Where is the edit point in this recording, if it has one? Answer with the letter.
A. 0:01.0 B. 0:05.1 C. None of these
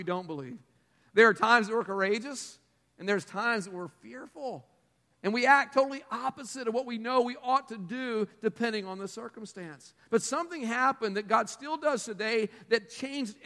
C